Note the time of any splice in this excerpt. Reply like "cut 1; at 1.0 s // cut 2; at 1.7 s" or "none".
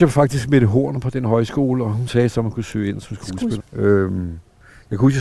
cut 1; at 3.6 s